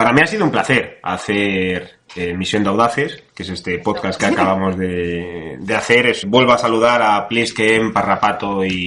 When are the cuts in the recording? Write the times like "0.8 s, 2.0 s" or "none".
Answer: 4.2 s, 6.2 s